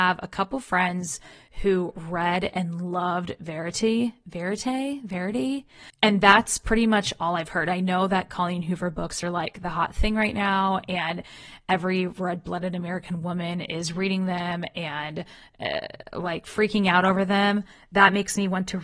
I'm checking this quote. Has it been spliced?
no; 0 cuts

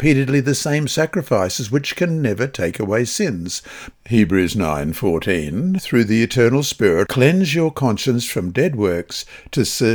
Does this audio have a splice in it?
yes; 3 cuts; at 3.9 s, 5.8 s, 7.0 s

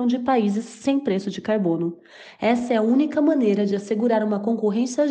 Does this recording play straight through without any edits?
yes; 0 cuts

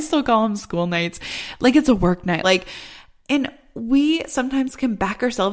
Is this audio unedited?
no; 1 cut; at 2.4 s

